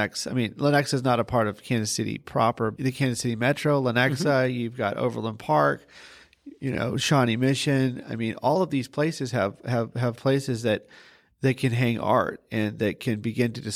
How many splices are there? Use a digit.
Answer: 1